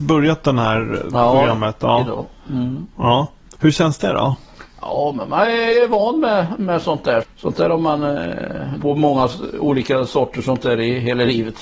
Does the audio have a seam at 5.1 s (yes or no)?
no